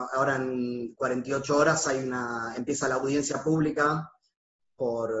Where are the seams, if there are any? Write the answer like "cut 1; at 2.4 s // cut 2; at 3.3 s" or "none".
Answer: none